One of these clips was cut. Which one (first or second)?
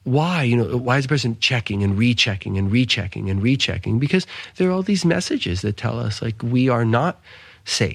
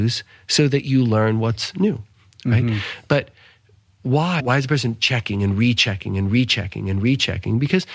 second